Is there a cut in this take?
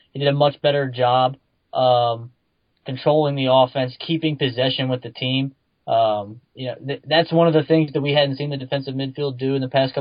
no; 0 cuts

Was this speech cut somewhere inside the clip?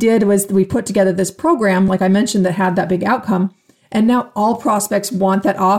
no; 0 cuts

